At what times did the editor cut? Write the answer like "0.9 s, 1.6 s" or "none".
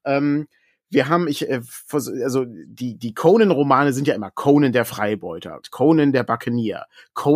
5.6 s